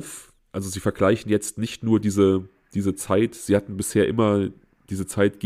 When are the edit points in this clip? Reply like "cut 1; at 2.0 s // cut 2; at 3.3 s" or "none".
none